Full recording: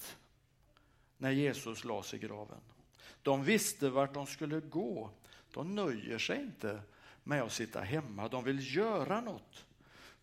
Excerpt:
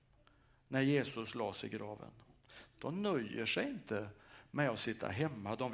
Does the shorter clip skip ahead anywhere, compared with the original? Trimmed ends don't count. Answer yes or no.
yes